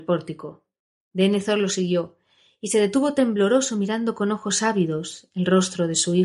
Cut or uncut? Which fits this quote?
uncut